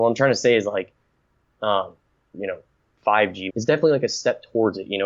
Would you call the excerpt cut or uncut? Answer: cut